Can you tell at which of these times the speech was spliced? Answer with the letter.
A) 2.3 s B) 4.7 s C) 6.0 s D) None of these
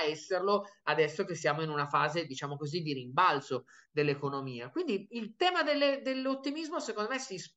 D